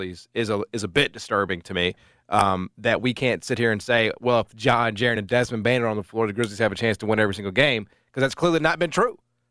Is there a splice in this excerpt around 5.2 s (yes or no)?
no